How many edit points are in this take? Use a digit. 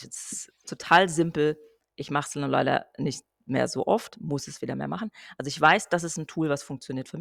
0